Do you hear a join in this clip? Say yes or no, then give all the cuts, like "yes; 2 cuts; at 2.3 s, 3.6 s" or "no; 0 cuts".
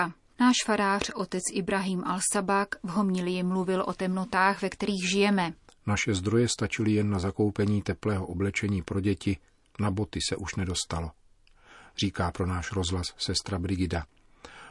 yes; 1 cut; at 5.7 s